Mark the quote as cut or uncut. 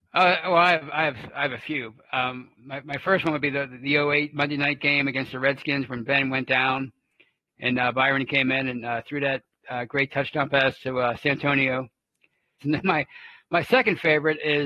cut